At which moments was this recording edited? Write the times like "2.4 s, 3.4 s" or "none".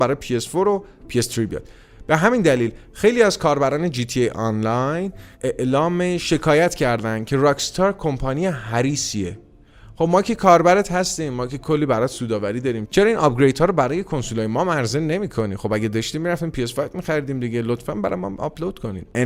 5.3 s